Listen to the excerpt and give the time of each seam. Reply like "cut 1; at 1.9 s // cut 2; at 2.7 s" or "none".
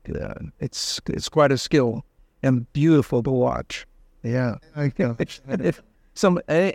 cut 1; at 4.6 s